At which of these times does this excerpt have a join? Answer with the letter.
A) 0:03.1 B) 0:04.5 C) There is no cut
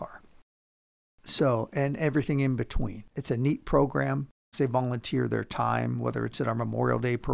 B